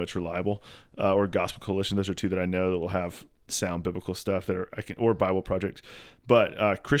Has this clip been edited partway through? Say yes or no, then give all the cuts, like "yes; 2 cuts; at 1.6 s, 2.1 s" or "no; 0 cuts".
no; 0 cuts